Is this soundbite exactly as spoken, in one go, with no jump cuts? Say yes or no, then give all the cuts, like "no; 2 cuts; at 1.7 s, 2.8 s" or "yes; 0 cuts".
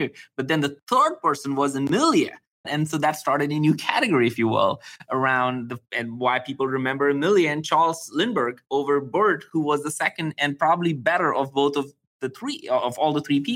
no; 1 cut; at 2.6 s